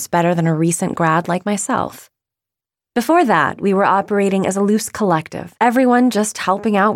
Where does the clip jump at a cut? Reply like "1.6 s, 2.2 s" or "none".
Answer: 2.8 s, 5.6 s